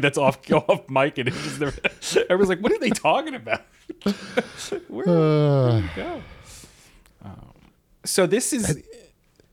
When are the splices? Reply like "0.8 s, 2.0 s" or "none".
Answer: none